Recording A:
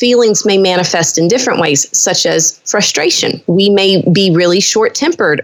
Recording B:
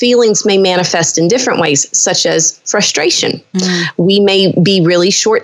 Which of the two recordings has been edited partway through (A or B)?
A